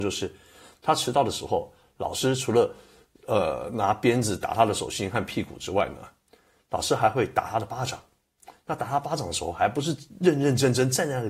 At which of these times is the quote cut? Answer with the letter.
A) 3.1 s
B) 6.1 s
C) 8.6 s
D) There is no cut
D